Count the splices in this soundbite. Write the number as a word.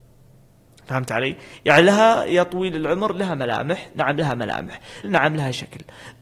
one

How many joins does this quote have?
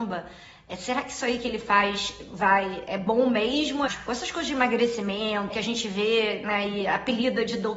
two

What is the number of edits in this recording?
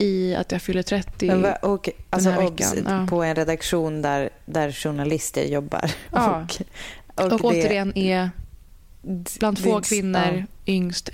zero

